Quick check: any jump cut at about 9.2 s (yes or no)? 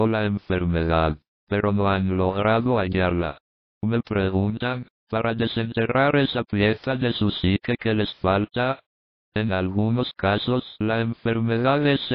no